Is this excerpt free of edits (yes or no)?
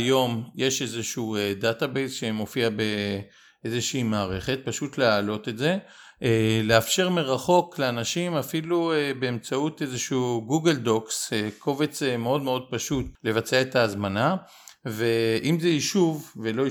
yes